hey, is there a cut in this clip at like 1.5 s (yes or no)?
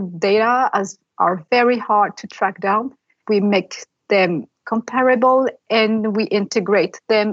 no